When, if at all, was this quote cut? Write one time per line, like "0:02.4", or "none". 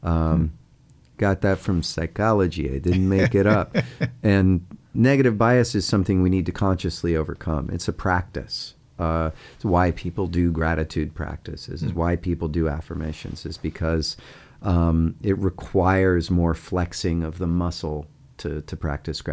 none